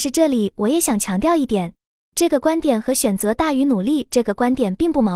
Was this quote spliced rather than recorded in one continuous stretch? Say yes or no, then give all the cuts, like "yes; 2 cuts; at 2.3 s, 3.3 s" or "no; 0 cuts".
no; 0 cuts